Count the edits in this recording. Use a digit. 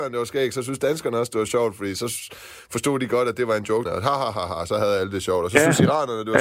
1